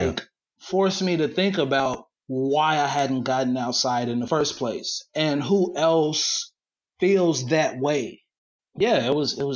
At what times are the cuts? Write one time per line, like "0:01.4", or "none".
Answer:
none